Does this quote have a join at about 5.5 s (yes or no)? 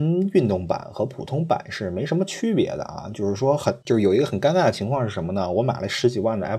no